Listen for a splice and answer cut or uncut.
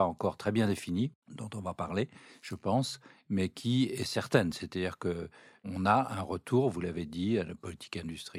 uncut